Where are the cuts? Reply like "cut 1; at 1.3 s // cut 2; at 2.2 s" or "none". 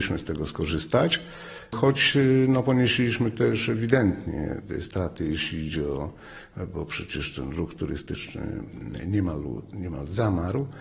none